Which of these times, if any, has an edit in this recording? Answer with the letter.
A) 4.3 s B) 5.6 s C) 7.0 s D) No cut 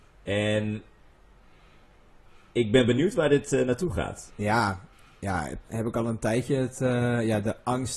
B